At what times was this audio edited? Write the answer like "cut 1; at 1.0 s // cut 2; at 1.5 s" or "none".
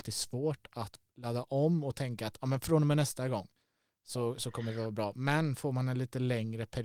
cut 1; at 1.1 s